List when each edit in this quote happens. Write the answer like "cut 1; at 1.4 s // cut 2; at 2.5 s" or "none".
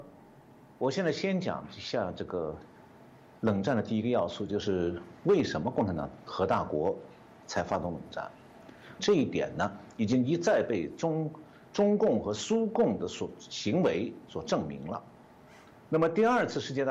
cut 1; at 9.0 s